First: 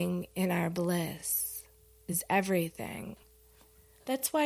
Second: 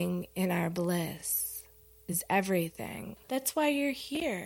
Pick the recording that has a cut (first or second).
second